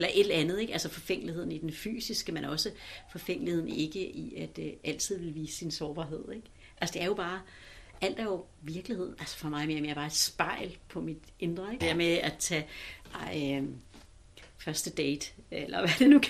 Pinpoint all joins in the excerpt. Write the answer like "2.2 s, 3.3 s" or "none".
11.8 s